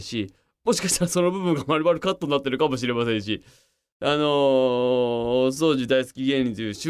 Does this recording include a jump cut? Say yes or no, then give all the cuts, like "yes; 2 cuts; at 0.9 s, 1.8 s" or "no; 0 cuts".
no; 0 cuts